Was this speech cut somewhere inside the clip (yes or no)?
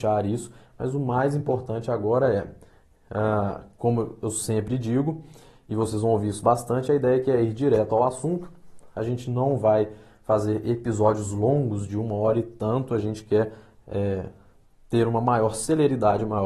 no